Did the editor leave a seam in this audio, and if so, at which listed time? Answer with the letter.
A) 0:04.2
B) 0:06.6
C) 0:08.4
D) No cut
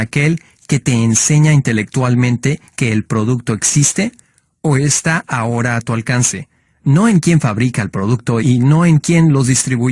C